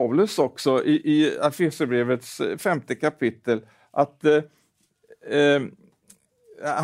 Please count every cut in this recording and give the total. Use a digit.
0